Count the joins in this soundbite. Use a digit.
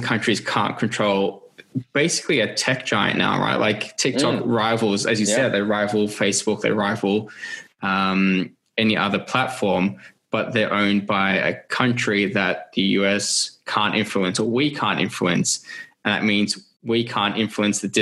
0